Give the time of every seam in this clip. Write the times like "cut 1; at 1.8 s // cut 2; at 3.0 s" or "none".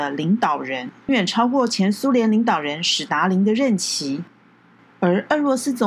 cut 1; at 1.1 s // cut 2; at 4.8 s